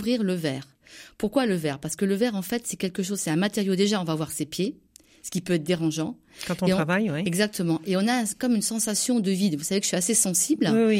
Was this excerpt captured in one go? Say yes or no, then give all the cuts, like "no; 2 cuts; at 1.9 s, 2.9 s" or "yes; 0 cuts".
yes; 0 cuts